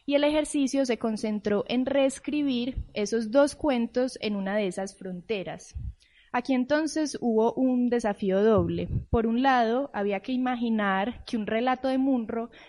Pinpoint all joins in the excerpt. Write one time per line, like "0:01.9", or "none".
none